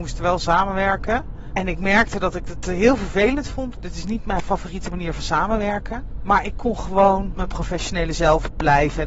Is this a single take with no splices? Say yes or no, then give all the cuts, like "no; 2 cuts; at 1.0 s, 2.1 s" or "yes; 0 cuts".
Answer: yes; 0 cuts